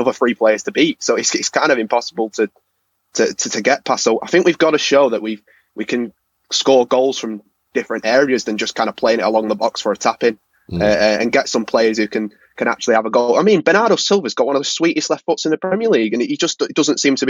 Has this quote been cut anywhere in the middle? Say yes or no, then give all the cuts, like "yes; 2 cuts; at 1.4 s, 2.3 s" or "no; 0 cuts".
no; 0 cuts